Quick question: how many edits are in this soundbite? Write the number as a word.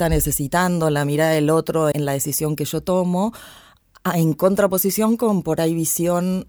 one